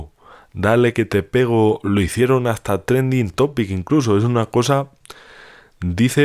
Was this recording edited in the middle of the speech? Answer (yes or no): no